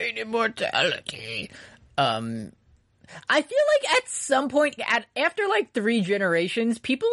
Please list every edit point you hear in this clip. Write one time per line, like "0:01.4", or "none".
0:04.8